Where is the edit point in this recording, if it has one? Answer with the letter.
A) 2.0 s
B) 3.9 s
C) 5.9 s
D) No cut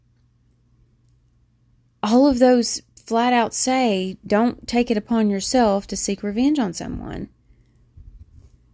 D